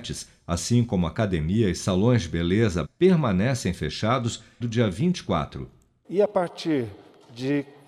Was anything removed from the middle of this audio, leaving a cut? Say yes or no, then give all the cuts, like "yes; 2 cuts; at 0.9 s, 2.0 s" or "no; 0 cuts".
yes; 3 cuts; at 2.8 s, 4.6 s, 6.0 s